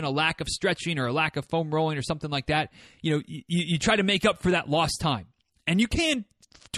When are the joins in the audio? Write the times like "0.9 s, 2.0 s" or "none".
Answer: none